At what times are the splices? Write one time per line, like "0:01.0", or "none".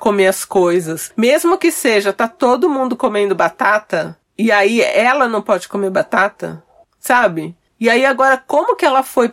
none